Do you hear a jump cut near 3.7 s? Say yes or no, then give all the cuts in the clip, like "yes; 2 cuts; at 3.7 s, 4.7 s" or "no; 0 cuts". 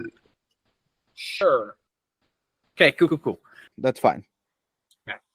yes; 1 cut; at 3.7 s